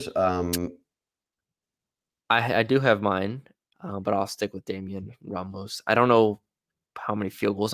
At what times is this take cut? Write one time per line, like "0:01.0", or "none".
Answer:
0:03.7

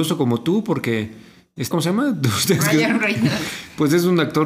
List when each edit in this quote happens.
0:01.7

